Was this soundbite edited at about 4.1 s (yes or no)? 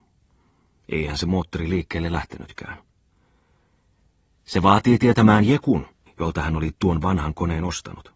no